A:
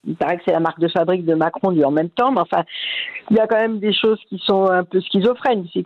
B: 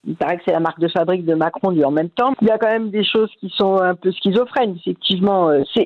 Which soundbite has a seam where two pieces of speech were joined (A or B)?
B